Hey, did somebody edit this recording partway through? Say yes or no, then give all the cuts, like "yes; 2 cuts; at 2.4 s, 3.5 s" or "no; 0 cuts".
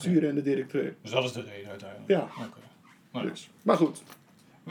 no; 0 cuts